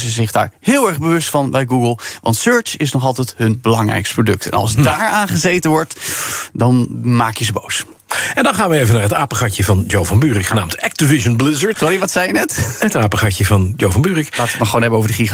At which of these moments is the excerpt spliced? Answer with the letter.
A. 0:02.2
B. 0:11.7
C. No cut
B